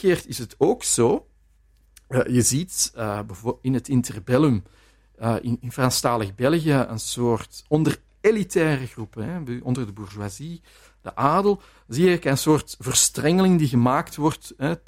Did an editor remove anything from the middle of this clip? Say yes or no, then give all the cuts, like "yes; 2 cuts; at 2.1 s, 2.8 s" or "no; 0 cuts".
no; 0 cuts